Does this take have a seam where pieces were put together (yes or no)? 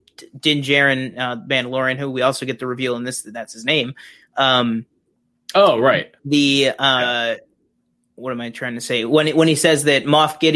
no